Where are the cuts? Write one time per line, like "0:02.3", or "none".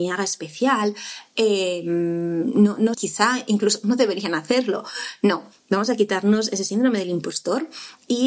0:02.9